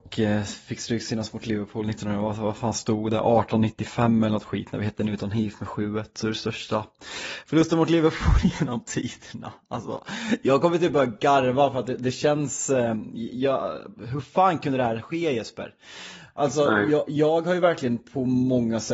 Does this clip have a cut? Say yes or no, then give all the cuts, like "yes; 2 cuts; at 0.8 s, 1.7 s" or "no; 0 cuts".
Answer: no; 0 cuts